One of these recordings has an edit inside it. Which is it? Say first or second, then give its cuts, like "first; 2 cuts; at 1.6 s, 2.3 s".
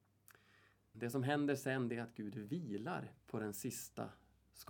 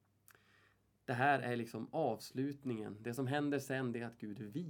first; 2 cuts; at 0.9 s, 3.2 s